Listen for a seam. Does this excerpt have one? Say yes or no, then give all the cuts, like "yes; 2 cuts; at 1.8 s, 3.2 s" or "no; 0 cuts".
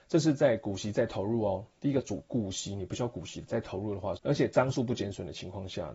yes; 1 cut; at 4.2 s